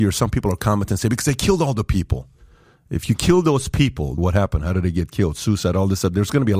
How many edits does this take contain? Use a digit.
1